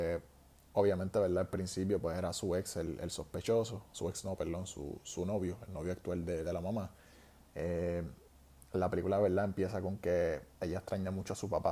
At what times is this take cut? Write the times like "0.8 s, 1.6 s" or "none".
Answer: 7.5 s